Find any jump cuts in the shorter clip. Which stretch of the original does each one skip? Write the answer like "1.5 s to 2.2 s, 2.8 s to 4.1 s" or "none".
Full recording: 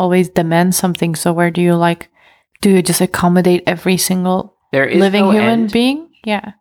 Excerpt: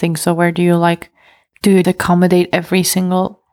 2.8 s to 3.0 s

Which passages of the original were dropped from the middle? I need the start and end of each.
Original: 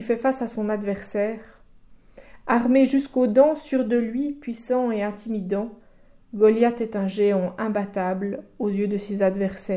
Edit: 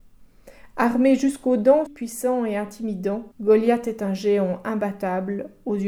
3.6 s to 4.3 s, 5.8 s to 6.2 s

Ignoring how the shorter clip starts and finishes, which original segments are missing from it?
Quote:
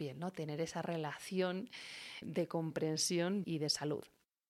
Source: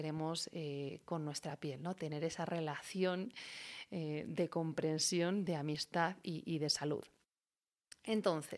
3.9 s to 4.2 s, 5.5 s to 6.4 s

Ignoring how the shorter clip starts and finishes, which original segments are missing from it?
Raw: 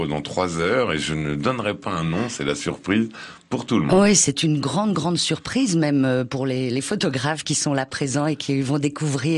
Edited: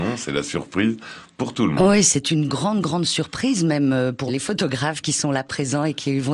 6.4 s to 6.7 s

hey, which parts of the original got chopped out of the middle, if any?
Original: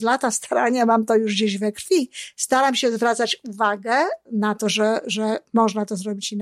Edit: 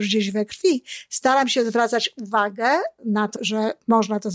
4.6 s to 5.0 s

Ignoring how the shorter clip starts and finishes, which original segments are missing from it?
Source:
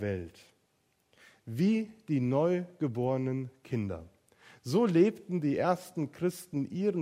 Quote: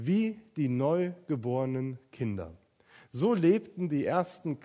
none

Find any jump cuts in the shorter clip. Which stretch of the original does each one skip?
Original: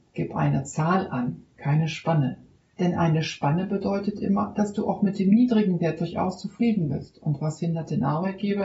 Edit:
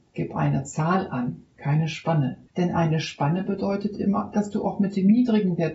2.5 s to 2.7 s

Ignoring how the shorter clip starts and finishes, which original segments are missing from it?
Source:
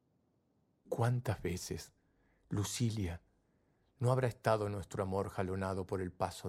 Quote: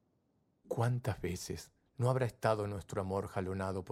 2.1 s to 3.9 s

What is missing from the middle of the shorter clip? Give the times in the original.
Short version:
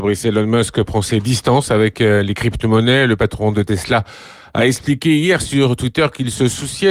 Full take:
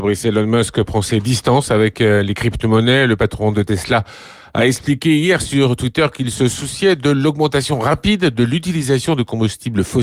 none

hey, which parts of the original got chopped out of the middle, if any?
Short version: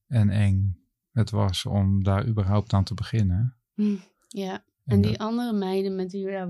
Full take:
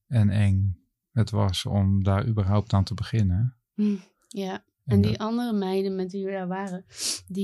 none

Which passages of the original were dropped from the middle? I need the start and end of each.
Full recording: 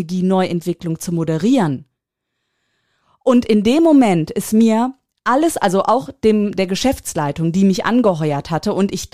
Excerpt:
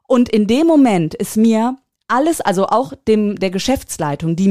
none

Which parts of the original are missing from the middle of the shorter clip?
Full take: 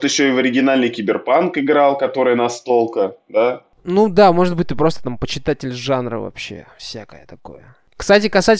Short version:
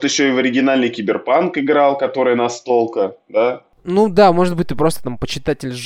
none

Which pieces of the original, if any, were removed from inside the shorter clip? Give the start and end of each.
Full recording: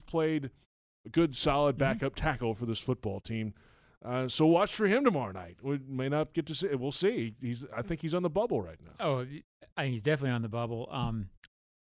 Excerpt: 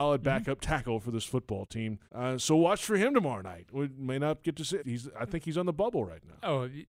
3.6 s to 4.0 s, 6.7 s to 7.4 s

